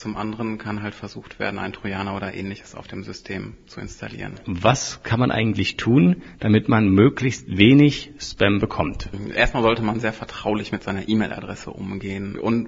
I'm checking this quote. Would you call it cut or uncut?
uncut